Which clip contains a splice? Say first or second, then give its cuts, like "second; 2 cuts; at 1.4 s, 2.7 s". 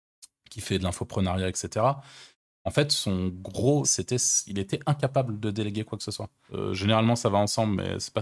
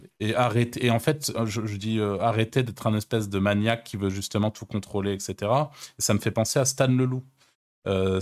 first; 3 cuts; at 2.5 s, 3.8 s, 6.5 s